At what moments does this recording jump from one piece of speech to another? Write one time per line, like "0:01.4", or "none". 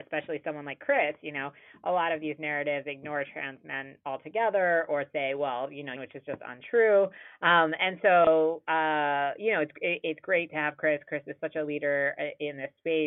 0:06.0